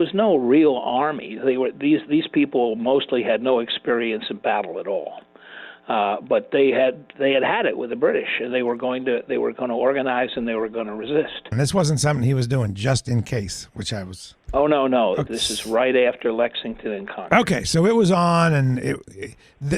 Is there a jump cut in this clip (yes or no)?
yes